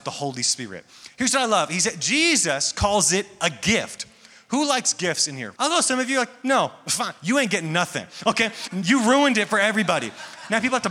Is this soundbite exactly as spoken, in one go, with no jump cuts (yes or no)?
no